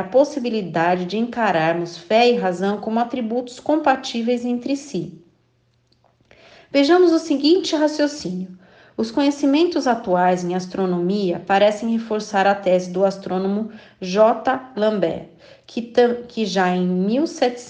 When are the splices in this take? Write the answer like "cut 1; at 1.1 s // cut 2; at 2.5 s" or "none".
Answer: cut 1; at 14.7 s